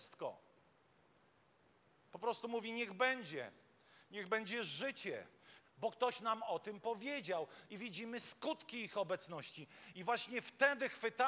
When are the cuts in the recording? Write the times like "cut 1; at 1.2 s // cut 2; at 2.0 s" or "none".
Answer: cut 1; at 5.6 s // cut 2; at 9.9 s